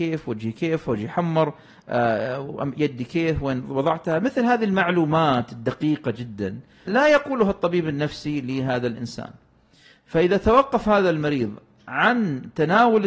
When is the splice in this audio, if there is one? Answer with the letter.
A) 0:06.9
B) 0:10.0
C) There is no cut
A